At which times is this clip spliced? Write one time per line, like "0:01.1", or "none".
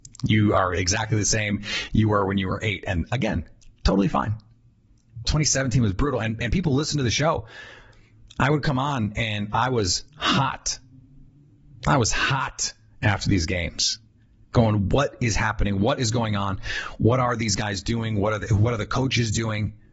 0:05.2